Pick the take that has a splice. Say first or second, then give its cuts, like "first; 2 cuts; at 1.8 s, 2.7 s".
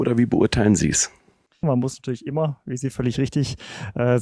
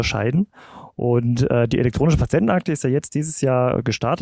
first; 1 cut; at 1.6 s